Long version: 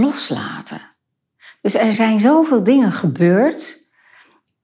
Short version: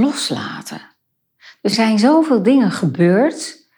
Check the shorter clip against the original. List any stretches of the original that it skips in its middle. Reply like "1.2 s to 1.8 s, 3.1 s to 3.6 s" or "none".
1.7 s to 1.9 s